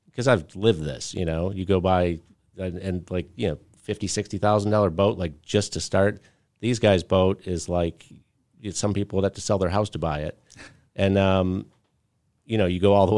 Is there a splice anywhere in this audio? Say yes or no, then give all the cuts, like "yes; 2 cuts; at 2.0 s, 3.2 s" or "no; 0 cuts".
no; 0 cuts